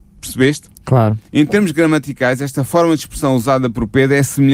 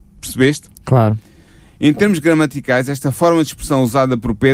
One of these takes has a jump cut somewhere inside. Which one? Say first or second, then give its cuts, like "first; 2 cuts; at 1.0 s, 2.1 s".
first; 1 cut; at 1.3 s